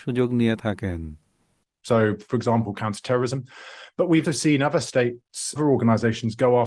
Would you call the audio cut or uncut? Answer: cut